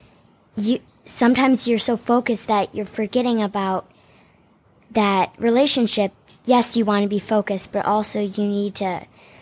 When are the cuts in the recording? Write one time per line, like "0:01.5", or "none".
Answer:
none